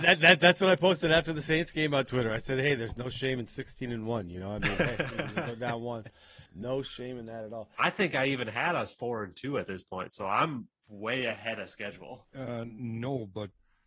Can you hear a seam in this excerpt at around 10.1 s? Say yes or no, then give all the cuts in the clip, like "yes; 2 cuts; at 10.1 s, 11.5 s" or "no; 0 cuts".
no; 2 cuts; at 6.5 s, 12.2 s